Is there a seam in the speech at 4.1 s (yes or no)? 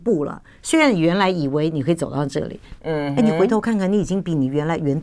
no